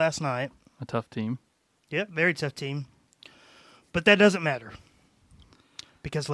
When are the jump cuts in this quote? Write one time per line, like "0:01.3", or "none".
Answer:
none